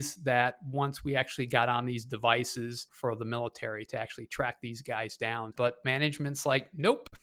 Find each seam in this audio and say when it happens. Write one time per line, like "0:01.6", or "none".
0:02.9
0:05.5